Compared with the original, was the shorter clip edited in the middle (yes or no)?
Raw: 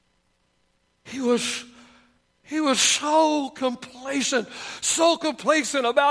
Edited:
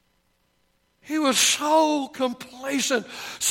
yes